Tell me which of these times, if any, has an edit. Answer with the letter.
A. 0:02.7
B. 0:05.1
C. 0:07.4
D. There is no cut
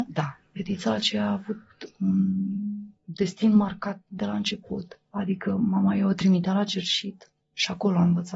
C